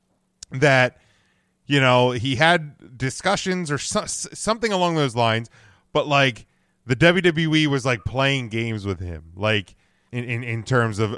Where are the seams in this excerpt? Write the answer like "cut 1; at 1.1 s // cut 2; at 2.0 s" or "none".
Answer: cut 1; at 10.1 s